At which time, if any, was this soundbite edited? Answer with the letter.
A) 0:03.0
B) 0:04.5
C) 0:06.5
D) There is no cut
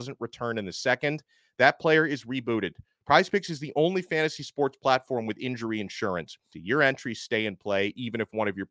C